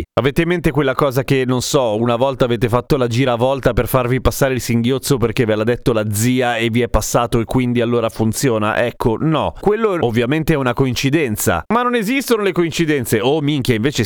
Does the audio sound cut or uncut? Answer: uncut